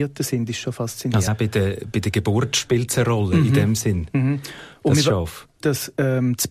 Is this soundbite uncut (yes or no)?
no